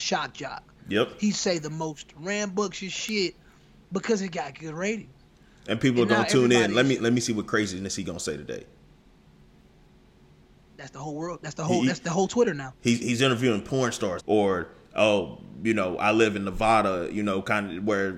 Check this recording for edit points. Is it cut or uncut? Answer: cut